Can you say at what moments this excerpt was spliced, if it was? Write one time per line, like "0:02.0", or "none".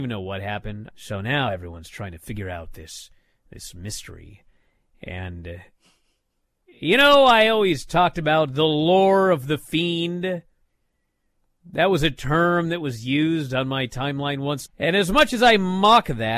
0:00.9
0:14.6